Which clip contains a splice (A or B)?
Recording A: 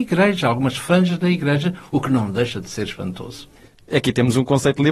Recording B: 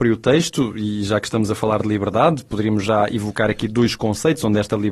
A